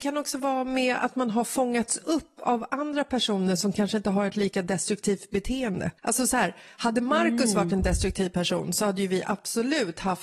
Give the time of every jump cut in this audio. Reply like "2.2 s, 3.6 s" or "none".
6.0 s

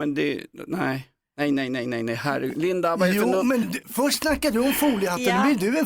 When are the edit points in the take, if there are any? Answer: 3.6 s

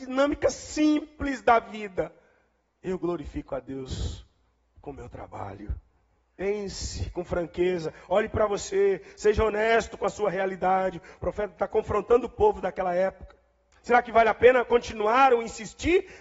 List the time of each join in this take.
6.2 s, 13.7 s

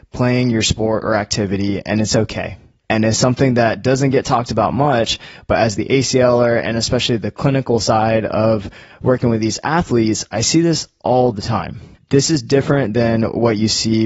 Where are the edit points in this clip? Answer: 2.8 s, 12.0 s

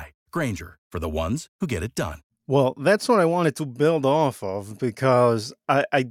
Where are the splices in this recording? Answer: none

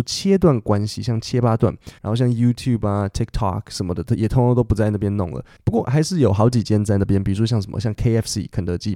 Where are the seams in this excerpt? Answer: 2.0 s

